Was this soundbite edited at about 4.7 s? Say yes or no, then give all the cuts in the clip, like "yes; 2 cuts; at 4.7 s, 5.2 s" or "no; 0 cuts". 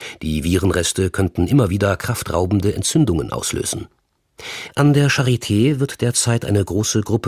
yes; 1 cut; at 4.7 s